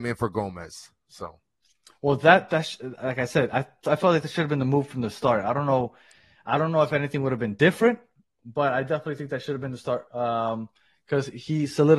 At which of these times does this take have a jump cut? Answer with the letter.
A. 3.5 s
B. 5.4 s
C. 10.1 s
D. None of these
C